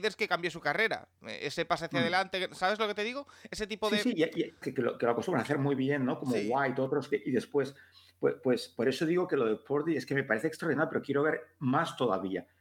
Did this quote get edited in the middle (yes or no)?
yes